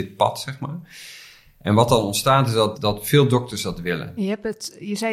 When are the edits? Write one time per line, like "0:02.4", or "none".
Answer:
0:02.7
0:04.2